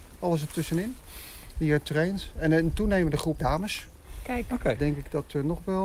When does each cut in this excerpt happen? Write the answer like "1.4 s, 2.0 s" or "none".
3.4 s, 4.8 s